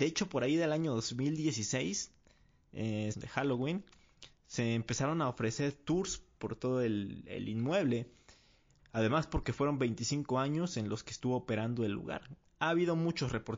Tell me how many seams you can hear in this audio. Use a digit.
3